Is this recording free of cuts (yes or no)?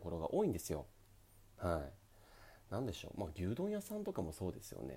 yes